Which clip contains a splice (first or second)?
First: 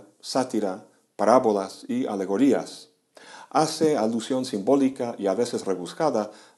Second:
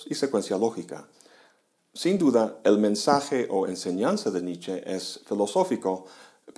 second